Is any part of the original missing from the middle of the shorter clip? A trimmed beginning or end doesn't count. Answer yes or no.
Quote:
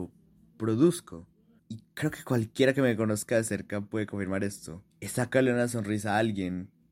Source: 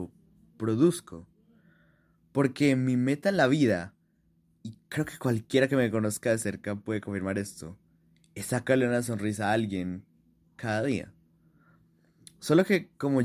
yes